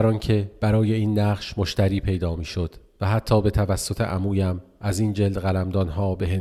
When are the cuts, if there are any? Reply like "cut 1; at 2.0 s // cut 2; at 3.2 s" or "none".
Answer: none